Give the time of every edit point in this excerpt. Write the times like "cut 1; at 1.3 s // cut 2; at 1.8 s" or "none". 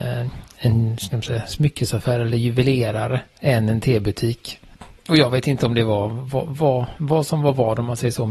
none

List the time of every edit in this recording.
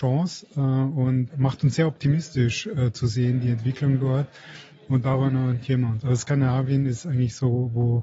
cut 1; at 1.3 s

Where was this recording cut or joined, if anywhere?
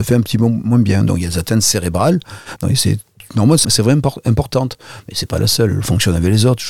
cut 1; at 2.6 s // cut 2; at 3.6 s

